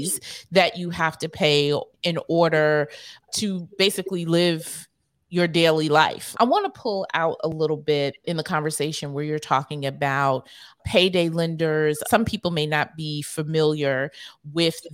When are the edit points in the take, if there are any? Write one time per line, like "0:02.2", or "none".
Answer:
0:06.3
0:12.0